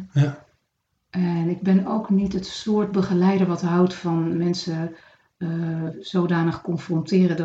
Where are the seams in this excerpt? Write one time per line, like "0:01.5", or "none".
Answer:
none